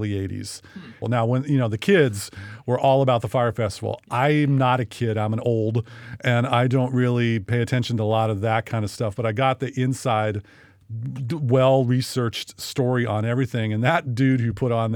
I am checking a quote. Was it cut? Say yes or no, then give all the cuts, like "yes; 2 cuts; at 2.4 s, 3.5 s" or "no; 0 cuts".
yes; 1 cut; at 1.0 s